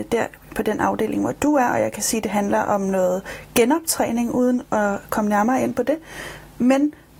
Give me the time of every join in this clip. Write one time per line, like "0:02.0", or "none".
none